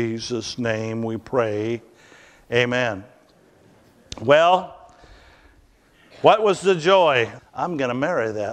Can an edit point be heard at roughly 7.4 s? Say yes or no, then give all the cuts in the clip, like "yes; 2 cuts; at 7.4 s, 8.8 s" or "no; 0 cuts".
yes; 1 cut; at 7.4 s